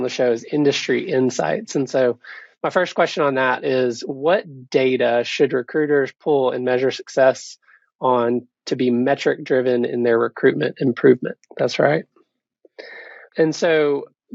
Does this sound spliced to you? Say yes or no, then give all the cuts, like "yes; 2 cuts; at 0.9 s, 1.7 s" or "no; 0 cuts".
yes; 1 cut; at 11.5 s